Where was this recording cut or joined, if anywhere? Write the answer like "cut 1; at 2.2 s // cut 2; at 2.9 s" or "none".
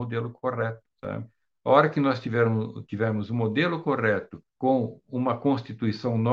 cut 1; at 0.9 s // cut 2; at 4.5 s